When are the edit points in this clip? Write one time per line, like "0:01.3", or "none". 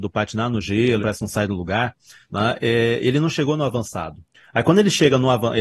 0:01.0